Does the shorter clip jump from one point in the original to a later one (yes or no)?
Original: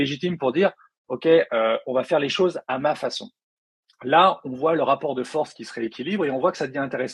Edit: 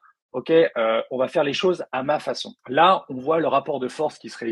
yes